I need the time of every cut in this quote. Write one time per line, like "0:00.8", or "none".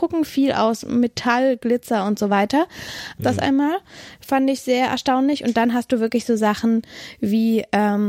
0:03.2